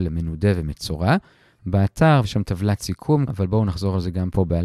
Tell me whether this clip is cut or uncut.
cut